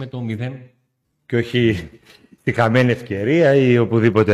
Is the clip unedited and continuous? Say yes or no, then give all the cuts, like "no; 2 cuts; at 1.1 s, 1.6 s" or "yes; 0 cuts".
no; 1 cut; at 1.0 s